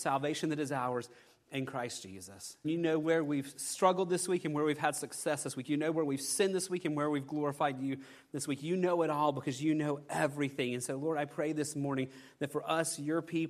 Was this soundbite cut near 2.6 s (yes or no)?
yes